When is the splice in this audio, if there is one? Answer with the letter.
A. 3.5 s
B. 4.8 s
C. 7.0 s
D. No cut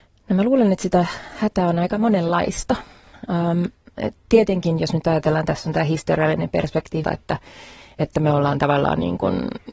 C